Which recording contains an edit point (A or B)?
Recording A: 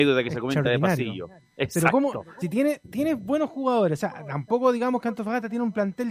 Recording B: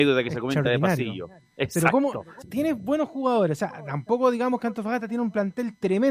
B